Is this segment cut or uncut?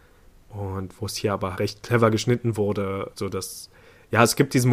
cut